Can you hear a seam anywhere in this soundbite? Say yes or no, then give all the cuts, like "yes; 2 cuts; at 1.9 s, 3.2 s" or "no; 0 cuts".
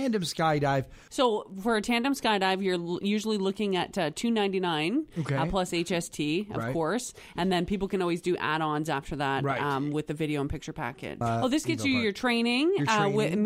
yes; 2 cuts; at 1.1 s, 11.2 s